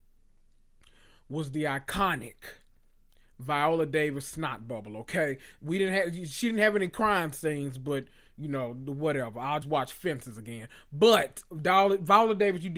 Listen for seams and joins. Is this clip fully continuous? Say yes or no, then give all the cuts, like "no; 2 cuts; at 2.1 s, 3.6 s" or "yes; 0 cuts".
no; 1 cut; at 9.6 s